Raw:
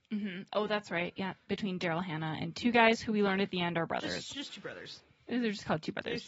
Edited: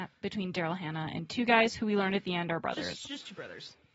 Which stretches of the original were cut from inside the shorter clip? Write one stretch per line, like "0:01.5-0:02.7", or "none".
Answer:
none